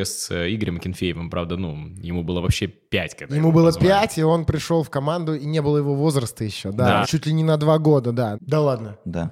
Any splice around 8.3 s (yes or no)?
yes